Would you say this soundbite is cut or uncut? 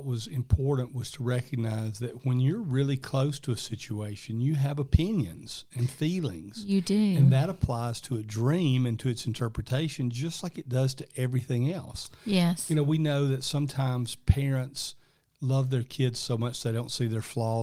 uncut